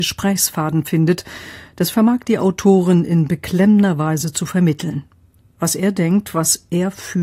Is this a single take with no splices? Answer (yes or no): no